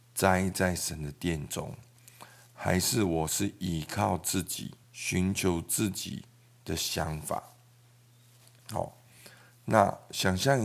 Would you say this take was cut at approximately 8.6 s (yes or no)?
no